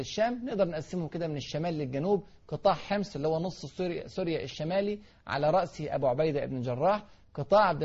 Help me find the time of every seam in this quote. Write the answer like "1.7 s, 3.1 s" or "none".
none